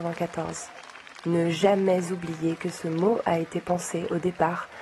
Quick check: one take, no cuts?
yes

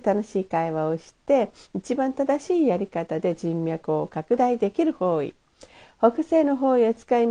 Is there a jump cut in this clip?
no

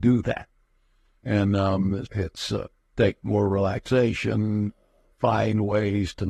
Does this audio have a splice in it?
yes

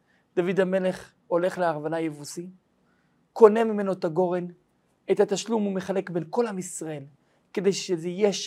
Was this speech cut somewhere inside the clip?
no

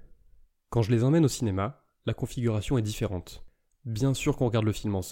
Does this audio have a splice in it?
no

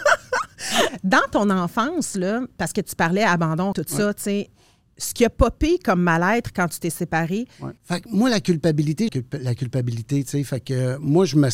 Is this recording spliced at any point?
yes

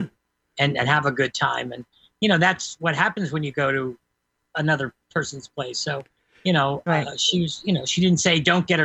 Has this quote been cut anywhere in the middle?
no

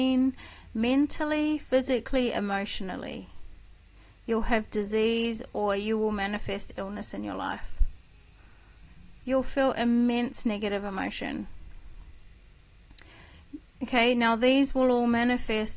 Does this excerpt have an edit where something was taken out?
no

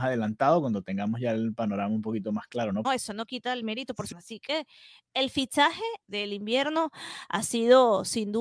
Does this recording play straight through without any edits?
no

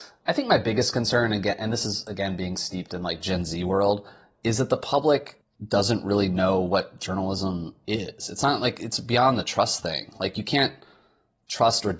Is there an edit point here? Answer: no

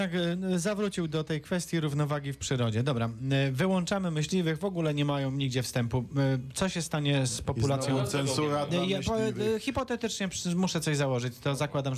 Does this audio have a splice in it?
no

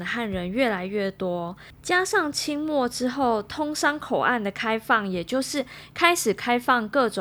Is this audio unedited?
yes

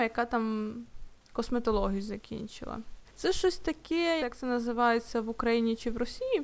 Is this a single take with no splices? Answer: no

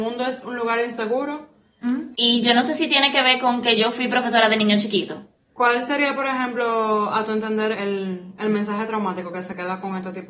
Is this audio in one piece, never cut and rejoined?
no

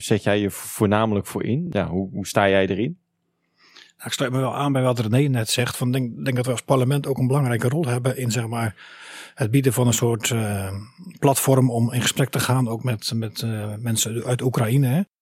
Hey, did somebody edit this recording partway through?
no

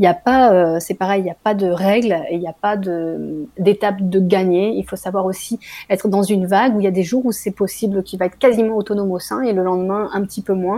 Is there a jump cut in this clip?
no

